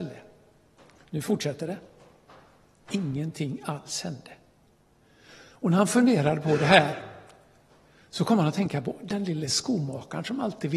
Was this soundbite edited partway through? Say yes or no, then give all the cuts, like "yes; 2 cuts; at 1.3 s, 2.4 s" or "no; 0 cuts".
no; 0 cuts